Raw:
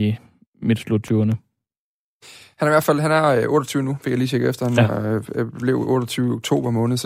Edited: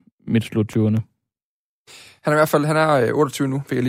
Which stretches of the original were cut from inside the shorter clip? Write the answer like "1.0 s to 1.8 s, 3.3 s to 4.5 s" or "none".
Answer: none